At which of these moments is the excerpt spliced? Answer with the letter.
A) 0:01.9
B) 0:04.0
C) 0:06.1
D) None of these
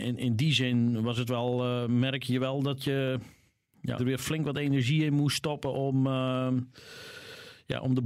B